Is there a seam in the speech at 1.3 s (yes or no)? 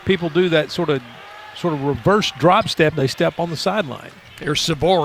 no